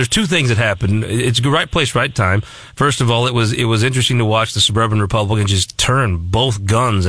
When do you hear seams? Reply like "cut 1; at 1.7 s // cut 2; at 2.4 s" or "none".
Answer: none